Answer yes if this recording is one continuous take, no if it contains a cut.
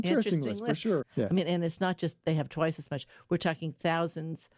no